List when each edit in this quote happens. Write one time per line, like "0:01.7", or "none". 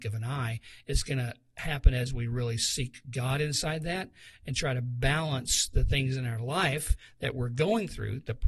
none